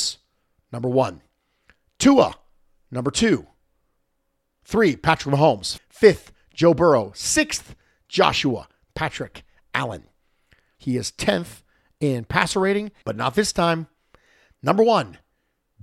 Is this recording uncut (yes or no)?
no